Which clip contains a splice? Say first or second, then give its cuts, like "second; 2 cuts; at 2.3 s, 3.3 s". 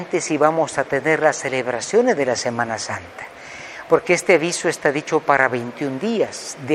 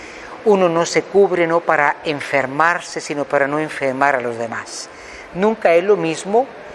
second; 1 cut; at 5.3 s